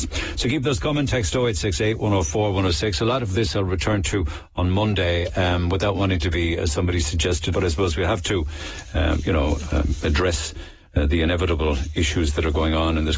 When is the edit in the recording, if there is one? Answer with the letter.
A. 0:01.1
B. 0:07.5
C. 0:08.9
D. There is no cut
B